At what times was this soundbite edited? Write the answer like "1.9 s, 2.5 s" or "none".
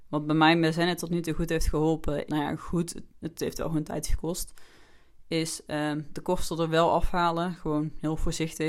2.3 s